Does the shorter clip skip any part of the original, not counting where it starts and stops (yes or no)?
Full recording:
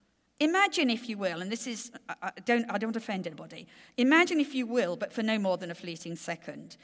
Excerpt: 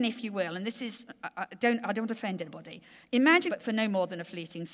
yes